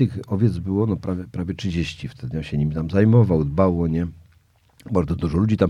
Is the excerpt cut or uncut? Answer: uncut